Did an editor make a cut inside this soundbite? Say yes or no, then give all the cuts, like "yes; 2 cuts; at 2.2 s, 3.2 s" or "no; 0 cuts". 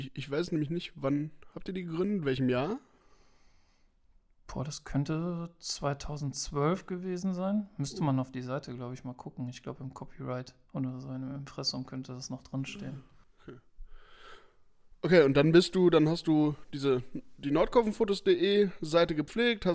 no; 0 cuts